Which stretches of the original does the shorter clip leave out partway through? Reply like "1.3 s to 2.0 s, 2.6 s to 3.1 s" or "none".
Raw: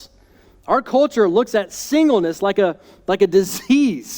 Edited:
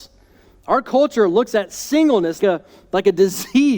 2.4 s to 2.5 s